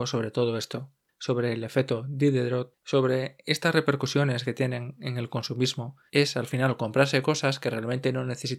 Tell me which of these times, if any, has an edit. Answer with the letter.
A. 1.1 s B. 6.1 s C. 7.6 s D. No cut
B